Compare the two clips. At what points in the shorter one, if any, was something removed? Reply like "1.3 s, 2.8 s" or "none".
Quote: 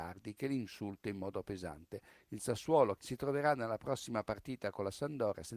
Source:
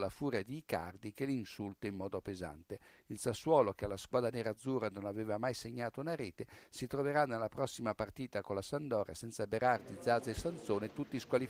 3.0 s